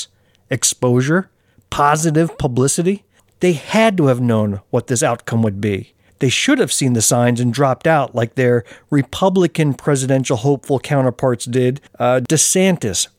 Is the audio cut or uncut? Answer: cut